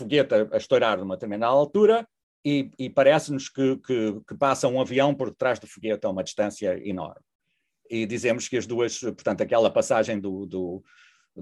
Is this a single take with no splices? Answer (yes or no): yes